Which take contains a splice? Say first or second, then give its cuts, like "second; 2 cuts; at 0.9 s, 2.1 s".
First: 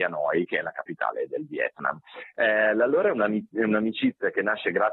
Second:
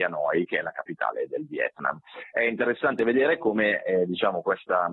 first; 1 cut; at 2.3 s